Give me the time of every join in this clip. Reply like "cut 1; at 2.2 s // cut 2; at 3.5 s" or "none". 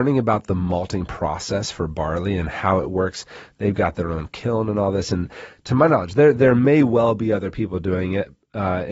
none

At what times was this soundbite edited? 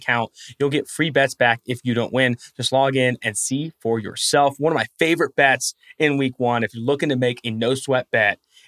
none

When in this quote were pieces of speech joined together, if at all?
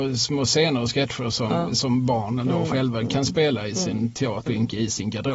cut 1; at 4.5 s

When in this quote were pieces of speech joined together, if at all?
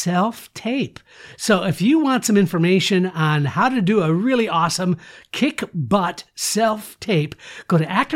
none

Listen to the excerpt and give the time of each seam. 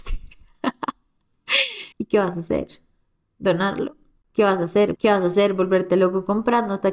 cut 1; at 1.9 s // cut 2; at 5.0 s

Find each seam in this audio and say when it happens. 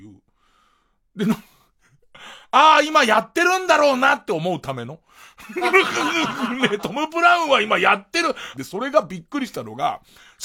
cut 1; at 8.5 s

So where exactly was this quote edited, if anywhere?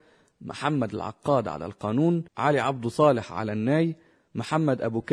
cut 1; at 2.3 s

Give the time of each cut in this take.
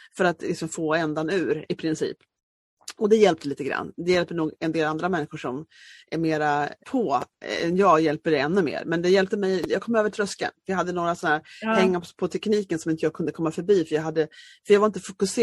cut 1; at 6.8 s

